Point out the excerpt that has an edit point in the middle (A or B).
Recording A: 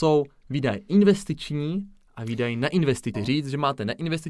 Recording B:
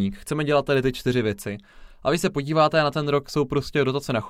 A